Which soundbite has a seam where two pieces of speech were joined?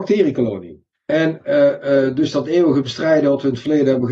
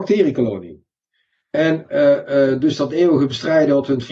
first; 1 cut; at 0.9 s

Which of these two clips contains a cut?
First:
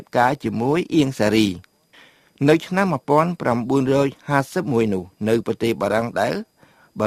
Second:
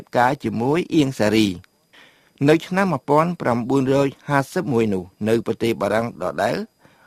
first; 1 cut; at 6.1 s

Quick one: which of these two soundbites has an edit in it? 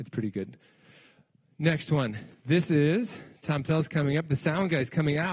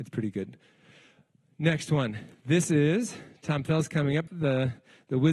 second; 1 cut; at 4.3 s

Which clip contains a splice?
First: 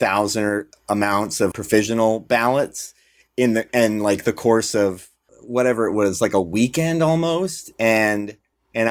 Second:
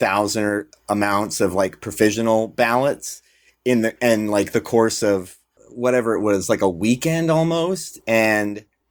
first; 1 cut; at 1.5 s

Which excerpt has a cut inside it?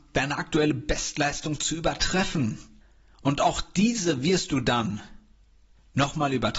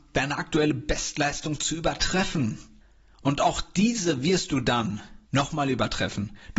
second; 1 cut; at 5.2 s

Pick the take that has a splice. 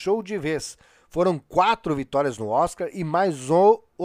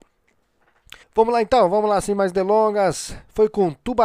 second; 1 cut; at 1.0 s

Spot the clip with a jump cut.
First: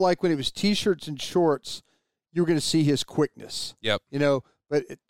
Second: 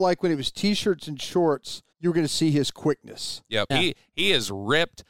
second; 2 cuts; at 1.9 s, 3.7 s

